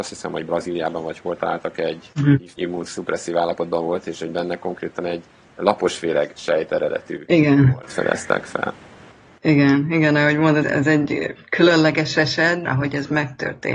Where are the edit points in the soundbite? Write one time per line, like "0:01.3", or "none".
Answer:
0:02.5
0:10.6
0:12.6